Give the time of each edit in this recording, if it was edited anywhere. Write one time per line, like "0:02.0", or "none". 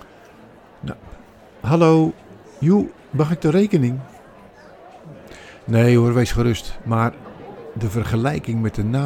0:06.8